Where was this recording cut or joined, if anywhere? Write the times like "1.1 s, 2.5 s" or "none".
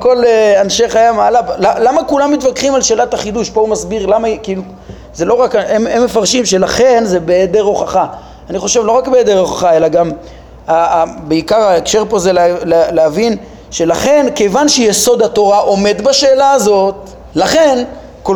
17.3 s